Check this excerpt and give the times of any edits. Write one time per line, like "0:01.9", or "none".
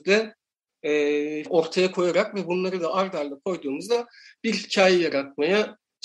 0:01.5